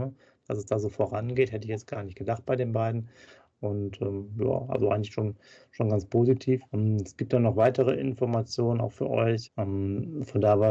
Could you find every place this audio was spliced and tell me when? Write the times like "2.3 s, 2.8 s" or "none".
6.7 s, 9.5 s